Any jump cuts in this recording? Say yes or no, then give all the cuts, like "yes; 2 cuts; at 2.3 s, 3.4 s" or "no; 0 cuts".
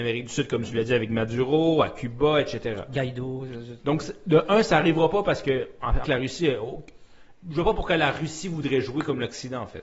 yes; 2 cuts; at 6.0 s, 7.3 s